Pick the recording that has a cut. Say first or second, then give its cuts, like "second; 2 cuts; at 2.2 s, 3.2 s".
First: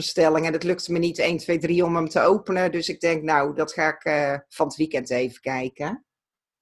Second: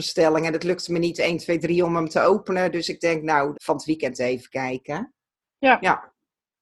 second; 2 cuts; at 3.5 s, 5.4 s